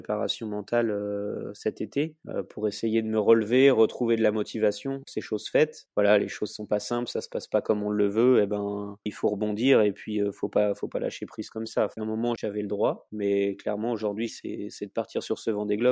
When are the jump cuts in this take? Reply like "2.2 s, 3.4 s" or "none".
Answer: 9.1 s, 12.4 s, 14.3 s